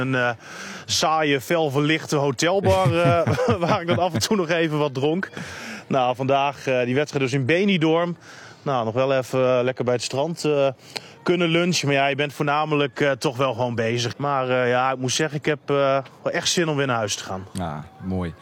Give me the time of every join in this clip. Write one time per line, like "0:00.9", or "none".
0:14.1